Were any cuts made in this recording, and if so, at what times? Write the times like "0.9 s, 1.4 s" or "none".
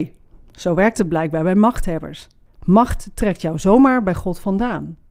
2.5 s